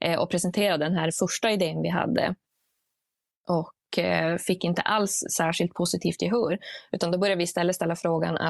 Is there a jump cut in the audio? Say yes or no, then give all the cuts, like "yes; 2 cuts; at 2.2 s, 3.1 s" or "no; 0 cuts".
no; 0 cuts